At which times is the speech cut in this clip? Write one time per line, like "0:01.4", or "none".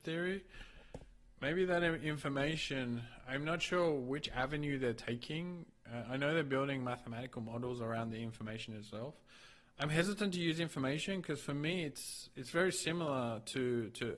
none